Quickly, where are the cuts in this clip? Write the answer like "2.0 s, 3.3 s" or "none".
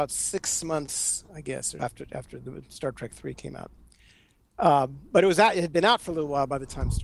1.8 s